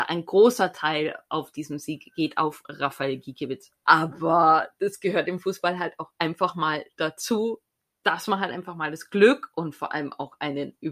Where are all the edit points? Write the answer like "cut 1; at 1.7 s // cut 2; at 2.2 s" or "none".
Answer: cut 1; at 3.8 s